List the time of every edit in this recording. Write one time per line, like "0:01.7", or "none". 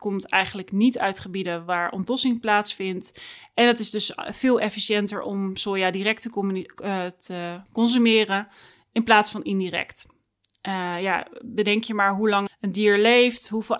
0:12.5